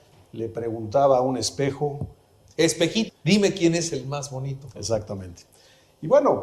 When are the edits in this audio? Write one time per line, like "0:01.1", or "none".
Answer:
0:03.1
0:04.8